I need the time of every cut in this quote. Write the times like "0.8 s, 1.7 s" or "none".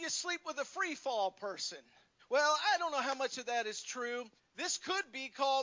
2.2 s, 4.4 s